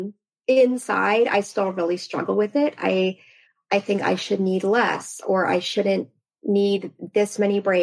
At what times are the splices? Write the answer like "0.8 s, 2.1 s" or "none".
none